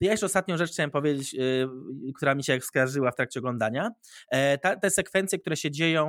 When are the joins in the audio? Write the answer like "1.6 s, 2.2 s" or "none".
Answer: none